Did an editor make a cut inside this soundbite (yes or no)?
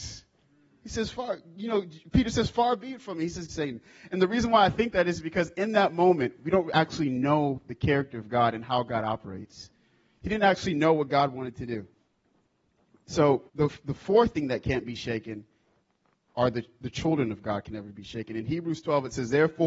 yes